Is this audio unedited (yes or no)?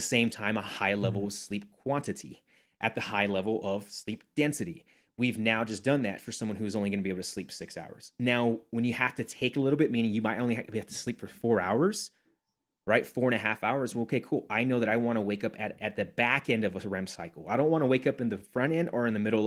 yes